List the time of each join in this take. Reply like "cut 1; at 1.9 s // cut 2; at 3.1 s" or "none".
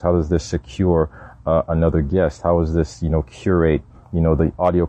none